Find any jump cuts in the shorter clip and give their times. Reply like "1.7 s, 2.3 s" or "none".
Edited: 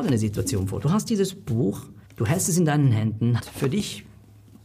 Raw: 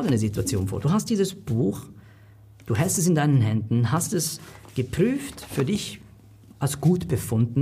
2.1 s, 3.4 s